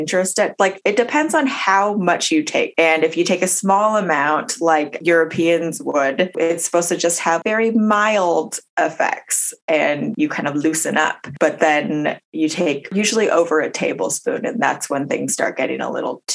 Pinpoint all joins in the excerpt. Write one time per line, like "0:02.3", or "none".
none